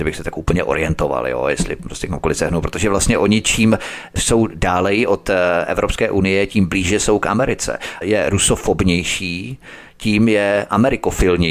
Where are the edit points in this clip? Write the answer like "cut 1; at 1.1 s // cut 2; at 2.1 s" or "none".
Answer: cut 1; at 8.0 s